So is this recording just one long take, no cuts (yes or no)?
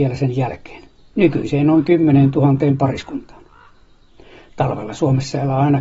yes